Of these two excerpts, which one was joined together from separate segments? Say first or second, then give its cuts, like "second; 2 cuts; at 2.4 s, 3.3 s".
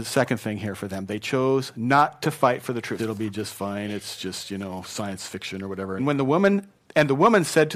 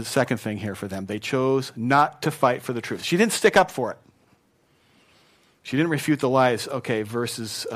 first; 2 cuts; at 3.0 s, 6.0 s